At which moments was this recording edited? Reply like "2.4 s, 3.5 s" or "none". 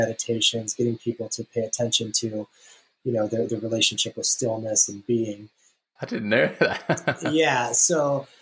6.0 s